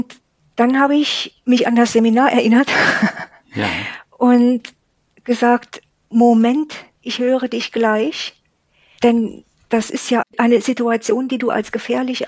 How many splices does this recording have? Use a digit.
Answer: 3